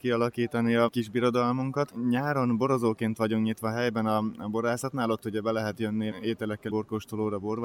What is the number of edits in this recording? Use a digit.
1